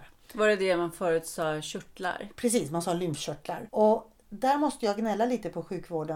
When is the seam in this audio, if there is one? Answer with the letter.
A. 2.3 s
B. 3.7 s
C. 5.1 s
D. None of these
B